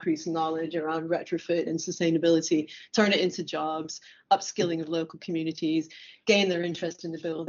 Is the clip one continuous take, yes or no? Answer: yes